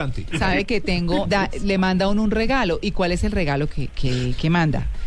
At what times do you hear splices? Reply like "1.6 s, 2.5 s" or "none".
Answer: 1.2 s